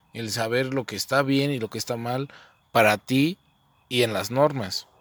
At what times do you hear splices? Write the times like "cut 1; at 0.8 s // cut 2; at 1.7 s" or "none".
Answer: none